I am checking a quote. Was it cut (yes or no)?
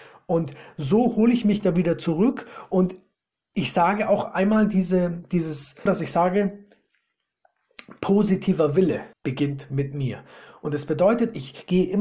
yes